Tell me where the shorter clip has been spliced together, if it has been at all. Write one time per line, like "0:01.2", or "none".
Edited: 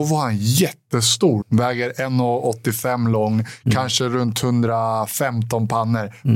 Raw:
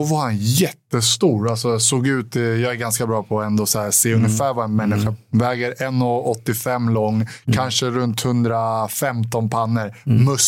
0:01.4